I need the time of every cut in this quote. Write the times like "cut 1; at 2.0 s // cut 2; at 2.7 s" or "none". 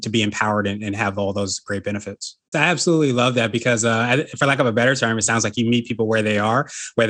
cut 1; at 2.5 s